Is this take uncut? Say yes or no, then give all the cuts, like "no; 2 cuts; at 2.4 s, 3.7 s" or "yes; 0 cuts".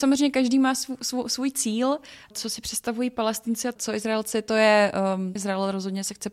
no; 1 cut; at 5.4 s